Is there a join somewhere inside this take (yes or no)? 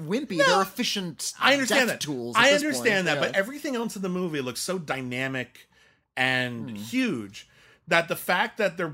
no